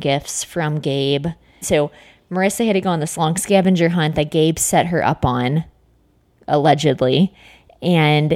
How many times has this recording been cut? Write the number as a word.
one